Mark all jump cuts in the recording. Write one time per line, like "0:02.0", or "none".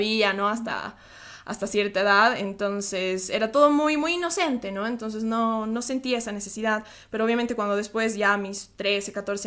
none